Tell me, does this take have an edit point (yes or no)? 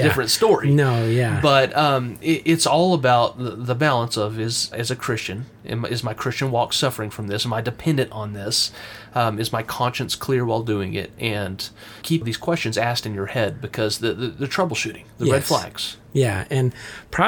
yes